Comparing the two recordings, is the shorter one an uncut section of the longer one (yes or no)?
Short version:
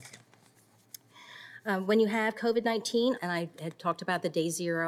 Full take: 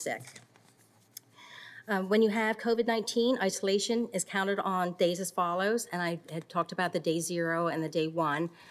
no